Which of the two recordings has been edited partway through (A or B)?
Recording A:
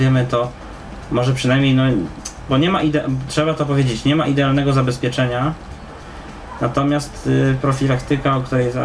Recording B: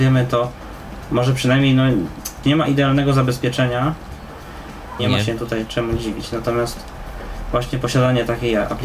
B